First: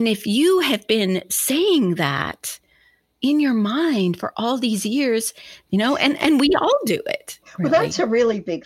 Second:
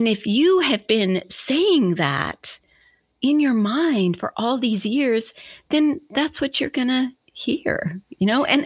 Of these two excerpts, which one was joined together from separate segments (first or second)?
first